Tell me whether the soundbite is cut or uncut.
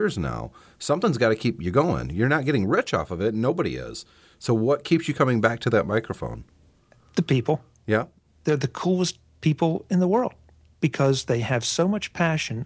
uncut